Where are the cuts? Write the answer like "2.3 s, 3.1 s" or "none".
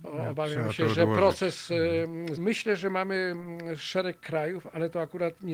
2.4 s